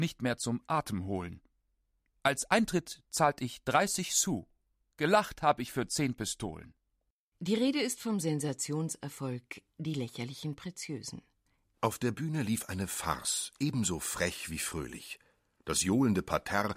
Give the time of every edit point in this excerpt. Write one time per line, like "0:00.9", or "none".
none